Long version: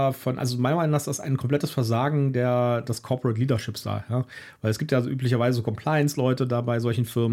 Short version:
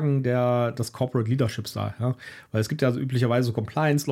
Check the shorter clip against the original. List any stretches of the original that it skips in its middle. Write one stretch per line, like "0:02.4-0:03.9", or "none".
none

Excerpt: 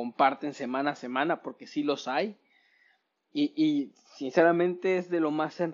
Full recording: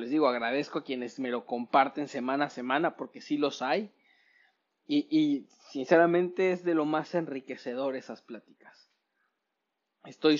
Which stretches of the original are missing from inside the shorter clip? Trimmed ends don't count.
none

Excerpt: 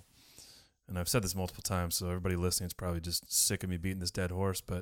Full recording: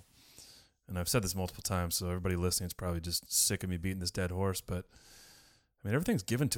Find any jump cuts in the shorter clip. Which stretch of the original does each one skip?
none

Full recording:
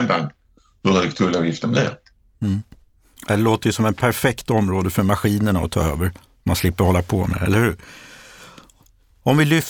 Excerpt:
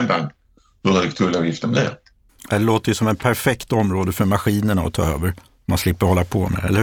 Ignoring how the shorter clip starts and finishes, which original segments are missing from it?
0:02.3-0:03.1

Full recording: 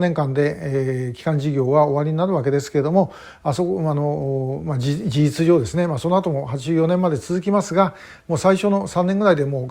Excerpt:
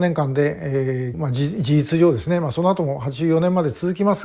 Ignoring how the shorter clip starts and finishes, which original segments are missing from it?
0:01.1-0:04.6

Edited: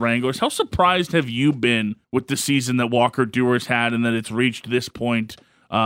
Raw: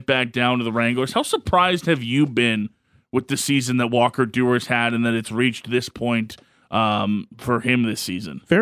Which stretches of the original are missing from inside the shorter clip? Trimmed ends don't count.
0:02.8-0:03.0

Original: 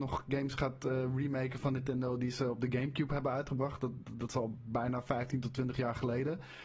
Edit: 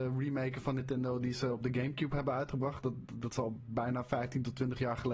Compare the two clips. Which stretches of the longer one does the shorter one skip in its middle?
none

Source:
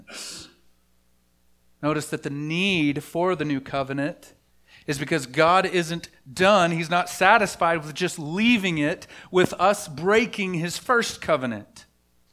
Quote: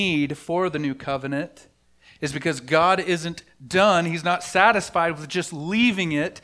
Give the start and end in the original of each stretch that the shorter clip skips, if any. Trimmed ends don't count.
none

